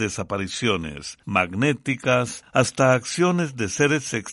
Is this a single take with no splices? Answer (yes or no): no